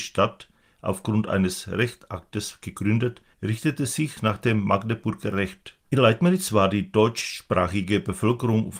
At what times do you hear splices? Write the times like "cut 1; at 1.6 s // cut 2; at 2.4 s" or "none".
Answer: cut 1; at 3.3 s // cut 2; at 5.9 s